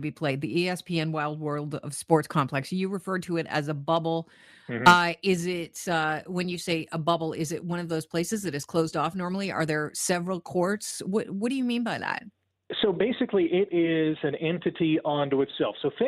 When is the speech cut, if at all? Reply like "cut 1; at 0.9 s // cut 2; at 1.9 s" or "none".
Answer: none